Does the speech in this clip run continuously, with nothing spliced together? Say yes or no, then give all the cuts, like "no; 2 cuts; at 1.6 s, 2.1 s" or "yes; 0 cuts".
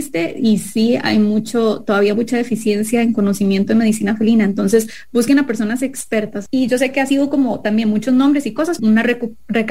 no; 2 cuts; at 6.5 s, 8.8 s